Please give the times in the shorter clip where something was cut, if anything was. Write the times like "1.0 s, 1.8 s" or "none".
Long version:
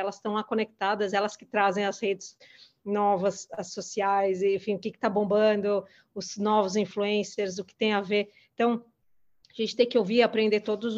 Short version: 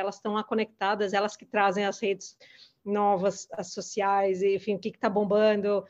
none

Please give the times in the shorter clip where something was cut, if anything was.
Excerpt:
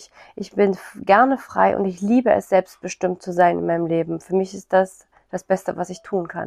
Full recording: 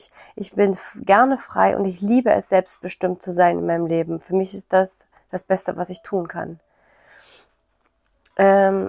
none

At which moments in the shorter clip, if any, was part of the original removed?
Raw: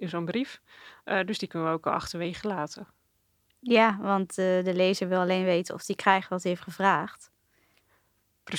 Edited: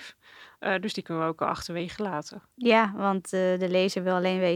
2.5 s

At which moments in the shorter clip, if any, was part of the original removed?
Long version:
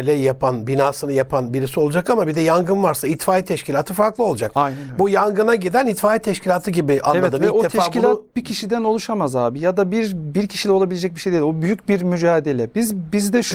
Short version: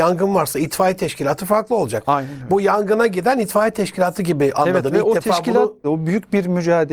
5.8 s

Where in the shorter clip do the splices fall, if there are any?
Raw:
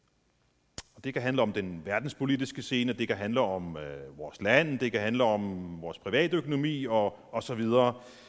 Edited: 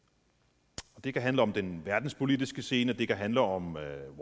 none

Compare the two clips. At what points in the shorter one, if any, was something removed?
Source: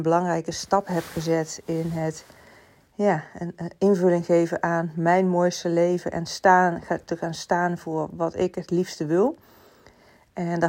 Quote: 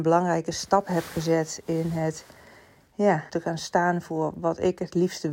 3.3 s

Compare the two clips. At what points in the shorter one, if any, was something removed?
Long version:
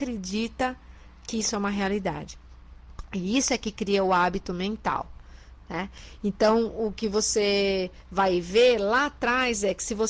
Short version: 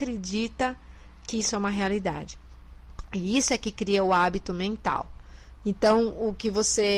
5.6 s

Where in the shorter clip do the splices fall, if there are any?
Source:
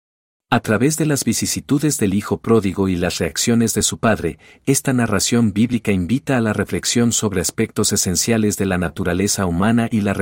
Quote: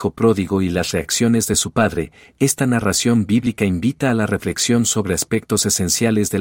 none

